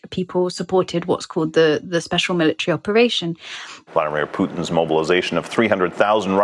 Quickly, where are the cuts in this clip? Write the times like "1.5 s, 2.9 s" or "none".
3.9 s